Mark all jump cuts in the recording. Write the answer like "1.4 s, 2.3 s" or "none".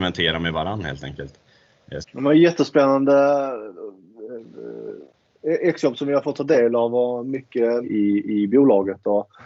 2.0 s, 7.8 s